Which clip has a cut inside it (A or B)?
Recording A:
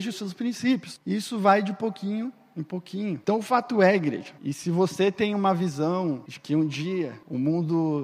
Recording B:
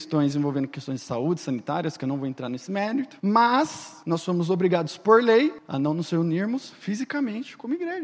A